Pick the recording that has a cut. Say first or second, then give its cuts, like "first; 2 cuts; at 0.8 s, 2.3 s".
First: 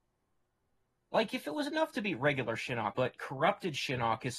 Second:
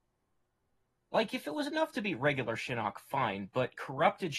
first; 1 cut; at 2.9 s